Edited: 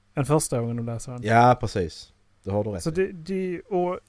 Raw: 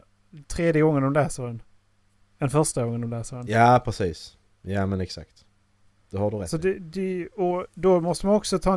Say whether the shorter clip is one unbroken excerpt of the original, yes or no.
no